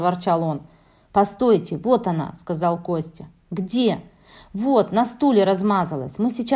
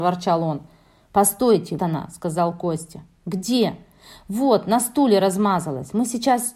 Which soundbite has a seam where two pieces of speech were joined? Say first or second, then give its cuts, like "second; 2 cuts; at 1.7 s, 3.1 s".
second; 1 cut; at 1.8 s